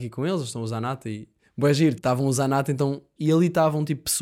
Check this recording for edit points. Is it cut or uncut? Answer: cut